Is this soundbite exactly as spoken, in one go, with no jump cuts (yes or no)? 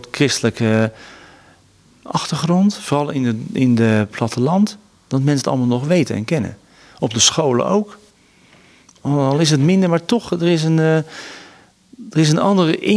yes